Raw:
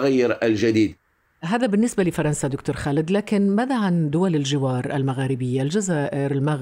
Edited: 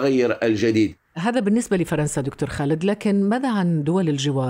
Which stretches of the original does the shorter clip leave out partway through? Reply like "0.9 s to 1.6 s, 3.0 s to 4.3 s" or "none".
1.1 s to 1.3 s